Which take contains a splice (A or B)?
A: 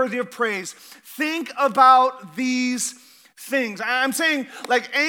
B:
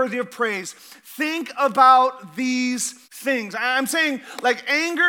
B